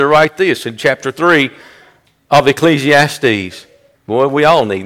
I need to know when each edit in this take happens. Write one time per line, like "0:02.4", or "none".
0:03.9